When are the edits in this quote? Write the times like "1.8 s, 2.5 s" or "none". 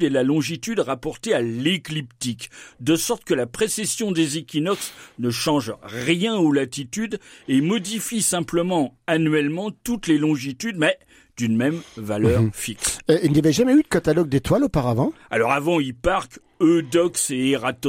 none